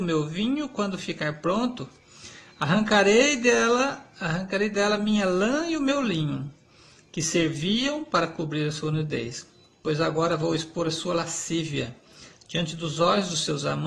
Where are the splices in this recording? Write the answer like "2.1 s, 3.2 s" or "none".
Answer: none